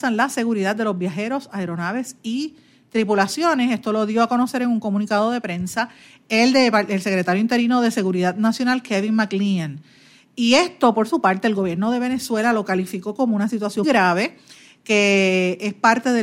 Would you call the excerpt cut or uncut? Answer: cut